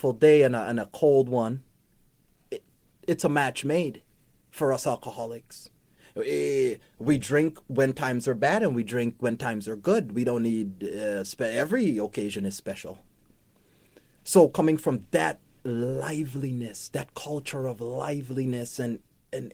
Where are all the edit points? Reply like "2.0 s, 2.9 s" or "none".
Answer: none